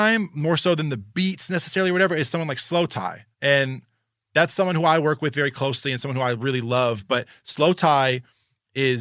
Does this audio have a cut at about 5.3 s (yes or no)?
no